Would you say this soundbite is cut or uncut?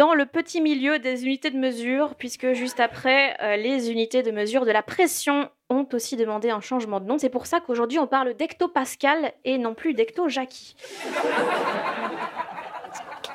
uncut